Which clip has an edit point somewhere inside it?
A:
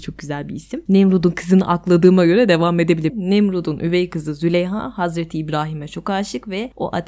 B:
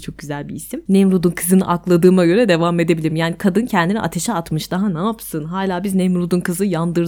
A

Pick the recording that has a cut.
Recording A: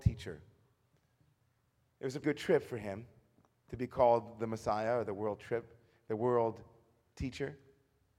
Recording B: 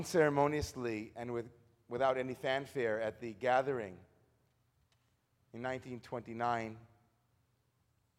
A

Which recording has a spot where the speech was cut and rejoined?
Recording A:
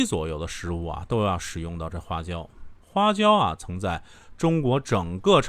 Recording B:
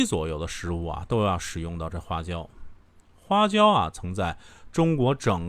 A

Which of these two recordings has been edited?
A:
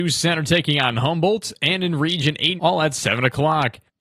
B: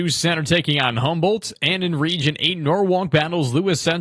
A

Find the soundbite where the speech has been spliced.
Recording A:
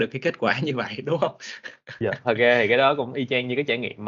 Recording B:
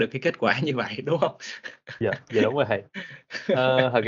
A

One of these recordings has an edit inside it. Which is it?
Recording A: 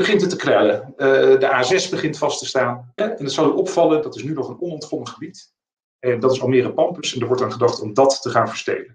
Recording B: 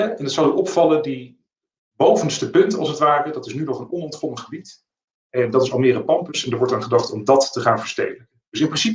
A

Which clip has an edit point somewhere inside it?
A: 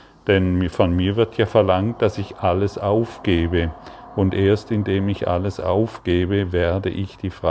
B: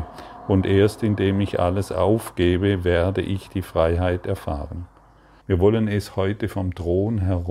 B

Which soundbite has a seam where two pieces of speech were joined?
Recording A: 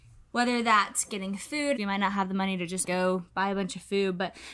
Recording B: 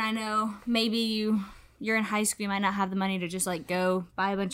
A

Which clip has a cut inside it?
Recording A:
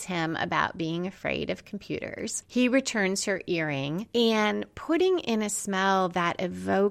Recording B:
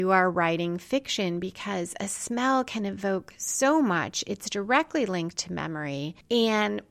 A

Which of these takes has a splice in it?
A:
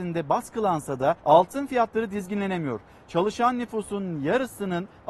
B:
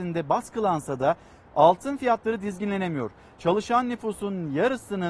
A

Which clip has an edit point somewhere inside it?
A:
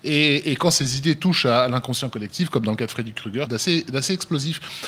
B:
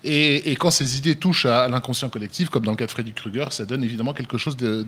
A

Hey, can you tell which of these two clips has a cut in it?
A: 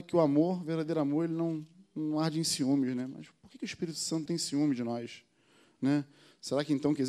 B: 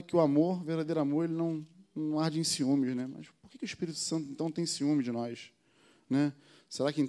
A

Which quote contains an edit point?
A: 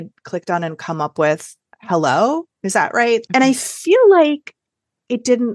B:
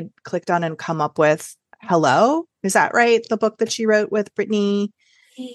A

